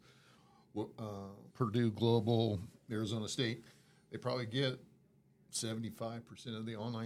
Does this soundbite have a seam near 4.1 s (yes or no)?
no